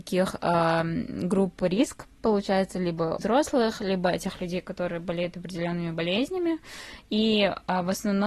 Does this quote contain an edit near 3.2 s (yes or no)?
yes